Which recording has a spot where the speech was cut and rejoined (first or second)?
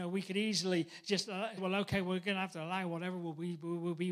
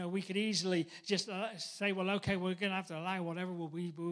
first